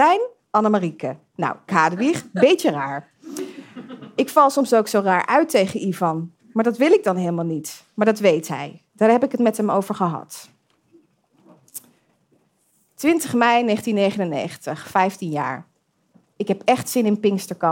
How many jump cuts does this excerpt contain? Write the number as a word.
one